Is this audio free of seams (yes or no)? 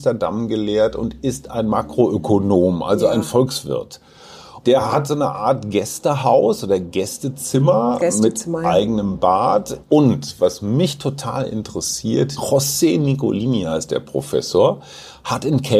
no